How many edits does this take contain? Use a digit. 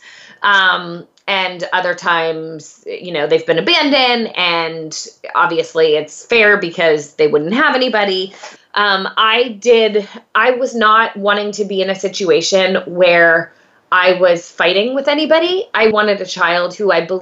2